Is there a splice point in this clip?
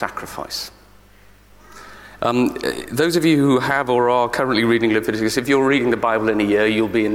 yes; 1 cut; at 2.2 s

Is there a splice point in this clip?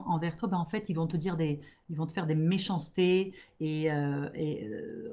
no; 0 cuts

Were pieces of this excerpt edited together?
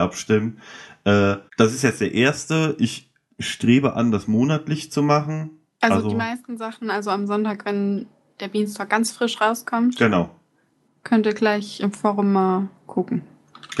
yes; 2 cuts; at 1.5 s, 5.8 s

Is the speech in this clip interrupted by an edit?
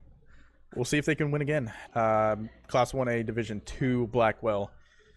yes; 1 cut; at 1.9 s

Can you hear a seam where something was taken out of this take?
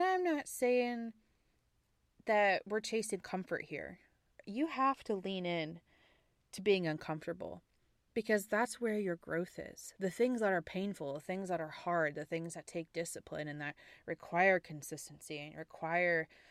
yes; 1 cut; at 4.4 s

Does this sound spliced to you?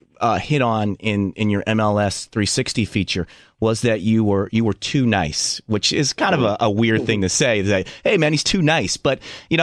no; 0 cuts

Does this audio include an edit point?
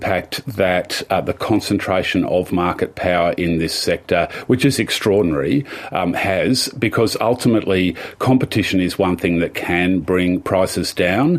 no; 0 cuts

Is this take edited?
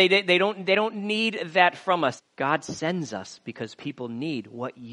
yes; 1 cut; at 2.2 s

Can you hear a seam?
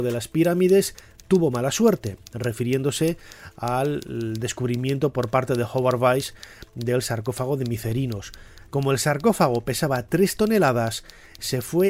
yes; 1 cut; at 8.7 s

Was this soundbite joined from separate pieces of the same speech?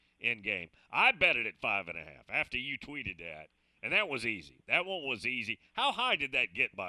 no; 0 cuts

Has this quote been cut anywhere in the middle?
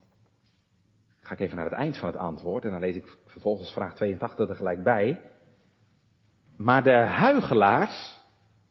no; 0 cuts

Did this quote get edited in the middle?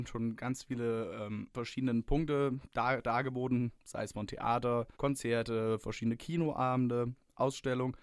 yes; 1 cut; at 5.0 s

